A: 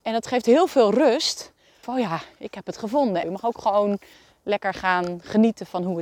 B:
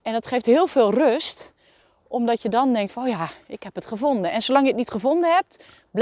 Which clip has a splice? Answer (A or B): A